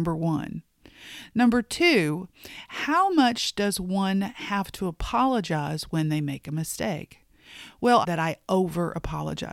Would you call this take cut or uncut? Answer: cut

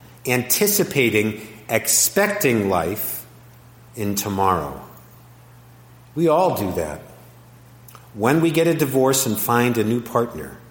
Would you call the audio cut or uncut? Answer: cut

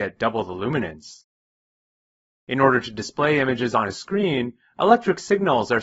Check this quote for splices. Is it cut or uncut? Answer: cut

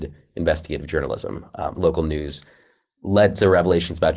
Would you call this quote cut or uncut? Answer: cut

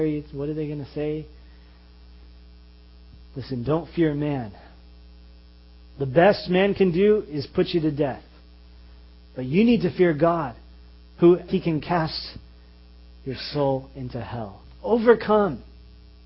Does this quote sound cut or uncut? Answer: cut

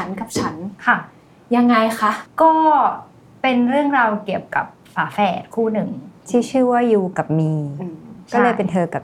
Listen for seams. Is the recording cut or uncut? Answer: uncut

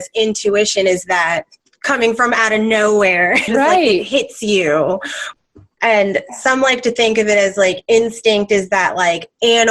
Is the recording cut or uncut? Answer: cut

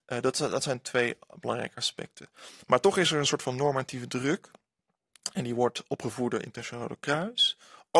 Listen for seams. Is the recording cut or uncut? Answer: uncut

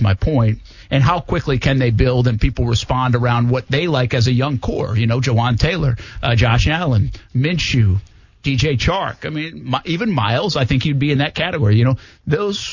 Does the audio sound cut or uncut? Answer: uncut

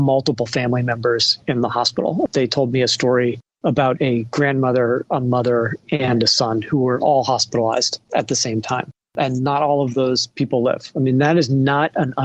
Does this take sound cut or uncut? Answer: uncut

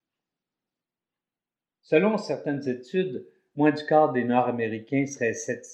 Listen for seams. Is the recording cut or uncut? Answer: uncut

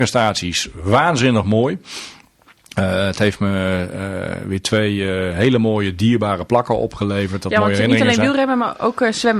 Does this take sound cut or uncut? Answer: uncut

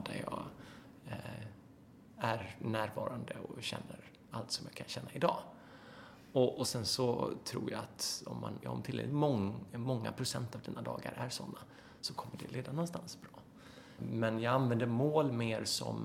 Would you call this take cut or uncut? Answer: cut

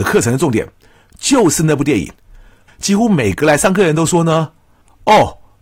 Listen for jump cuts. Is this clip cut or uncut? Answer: cut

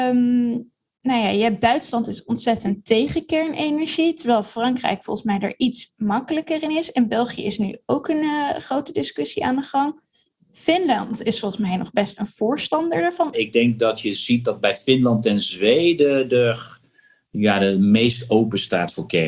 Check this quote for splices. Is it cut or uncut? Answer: cut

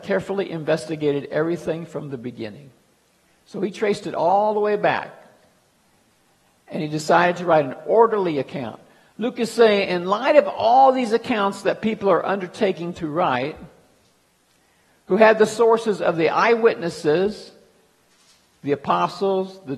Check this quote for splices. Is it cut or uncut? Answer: cut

